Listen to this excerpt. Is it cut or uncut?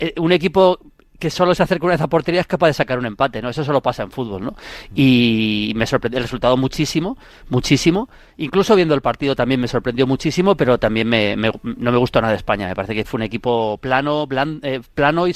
uncut